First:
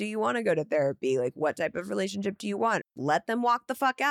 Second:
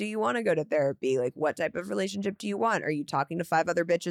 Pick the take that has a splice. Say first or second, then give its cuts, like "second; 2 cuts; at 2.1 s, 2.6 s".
first; 1 cut; at 2.8 s